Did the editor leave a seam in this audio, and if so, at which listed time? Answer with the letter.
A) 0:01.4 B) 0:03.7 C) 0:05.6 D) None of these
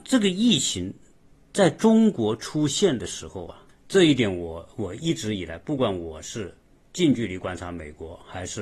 B